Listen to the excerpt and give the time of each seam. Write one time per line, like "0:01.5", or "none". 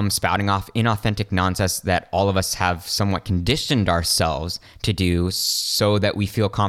none